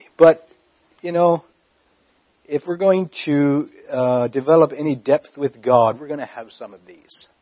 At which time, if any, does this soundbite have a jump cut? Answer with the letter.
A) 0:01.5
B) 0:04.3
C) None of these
C